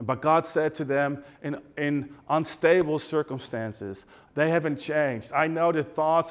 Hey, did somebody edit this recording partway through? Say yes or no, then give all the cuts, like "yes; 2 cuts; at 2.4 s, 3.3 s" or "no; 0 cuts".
yes; 1 cut; at 4.3 s